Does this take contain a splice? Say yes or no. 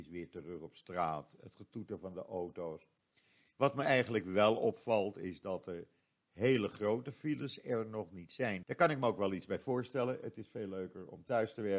yes